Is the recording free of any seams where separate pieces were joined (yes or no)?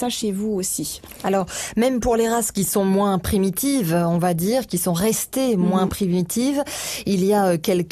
yes